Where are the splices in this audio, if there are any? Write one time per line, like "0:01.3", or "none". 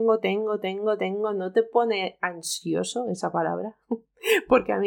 none